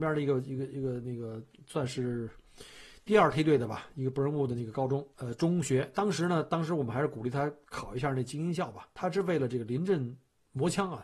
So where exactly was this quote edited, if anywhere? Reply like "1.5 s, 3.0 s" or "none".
5.1 s, 7.6 s